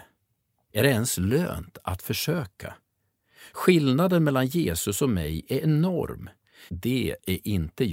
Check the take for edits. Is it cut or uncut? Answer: cut